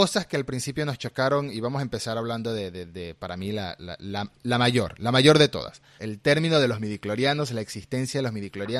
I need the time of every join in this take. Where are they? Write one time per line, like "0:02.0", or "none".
0:06.0